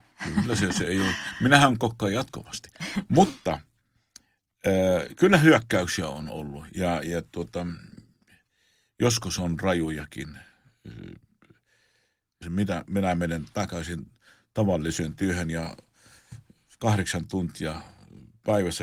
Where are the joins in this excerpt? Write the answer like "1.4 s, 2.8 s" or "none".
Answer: 12.4 s

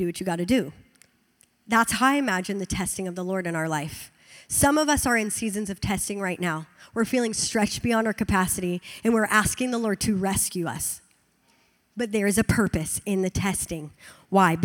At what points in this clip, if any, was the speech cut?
none

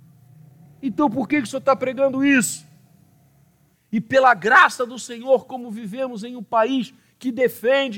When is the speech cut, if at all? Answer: 3.7 s

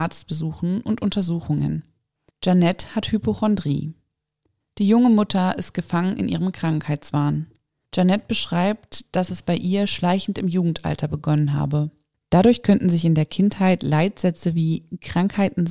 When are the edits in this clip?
2.3 s, 12.2 s

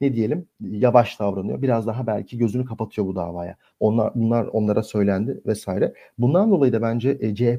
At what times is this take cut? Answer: 3.8 s

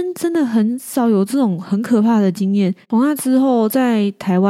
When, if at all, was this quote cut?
2.8 s

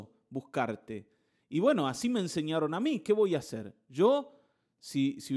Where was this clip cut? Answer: none

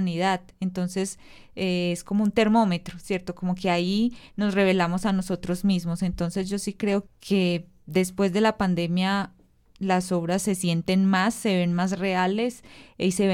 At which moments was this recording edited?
7.1 s

